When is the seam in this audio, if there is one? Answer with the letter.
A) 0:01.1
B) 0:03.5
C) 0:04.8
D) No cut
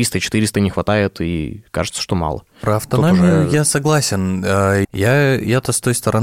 C